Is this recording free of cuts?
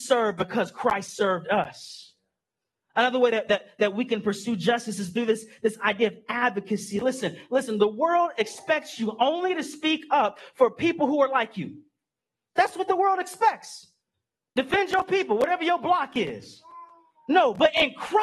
yes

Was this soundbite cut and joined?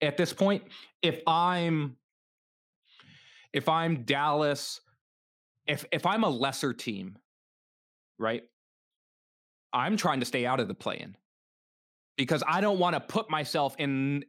no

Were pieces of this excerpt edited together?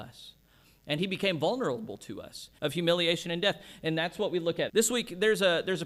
yes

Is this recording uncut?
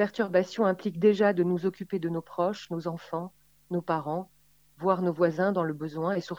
yes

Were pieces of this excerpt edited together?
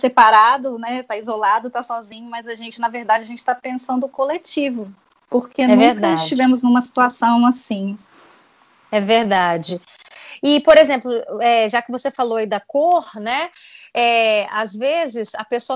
no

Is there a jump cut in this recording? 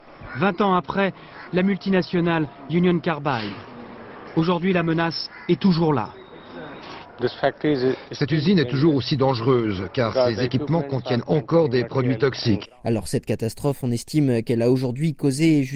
yes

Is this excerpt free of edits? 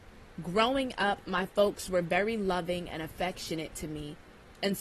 yes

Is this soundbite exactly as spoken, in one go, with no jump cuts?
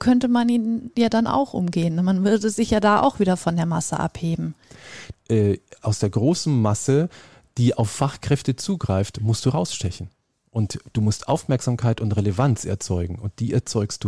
no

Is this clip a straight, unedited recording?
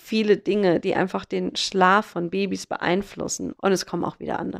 no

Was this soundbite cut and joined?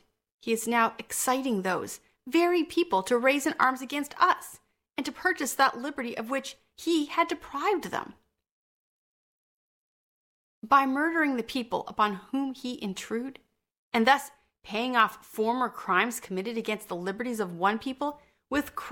no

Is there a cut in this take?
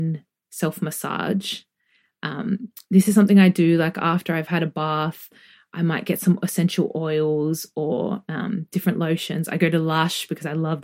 no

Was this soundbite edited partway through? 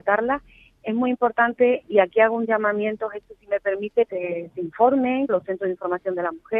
yes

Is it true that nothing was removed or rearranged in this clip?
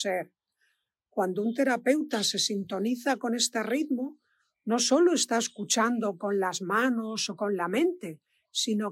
yes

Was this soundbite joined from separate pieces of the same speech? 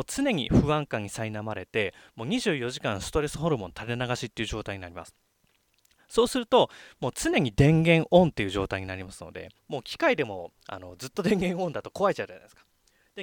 yes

